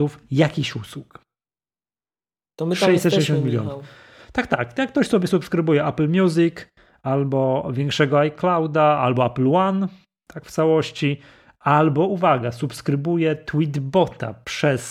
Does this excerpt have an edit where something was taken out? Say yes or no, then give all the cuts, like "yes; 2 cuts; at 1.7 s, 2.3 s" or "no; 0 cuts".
no; 0 cuts